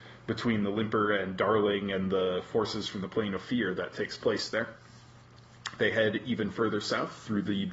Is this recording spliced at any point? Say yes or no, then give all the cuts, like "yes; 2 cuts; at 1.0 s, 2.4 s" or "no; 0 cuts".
no; 0 cuts